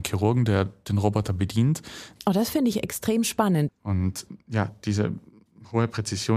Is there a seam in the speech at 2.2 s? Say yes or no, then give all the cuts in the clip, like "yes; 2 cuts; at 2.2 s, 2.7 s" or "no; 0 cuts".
yes; 2 cuts; at 2.2 s, 3.7 s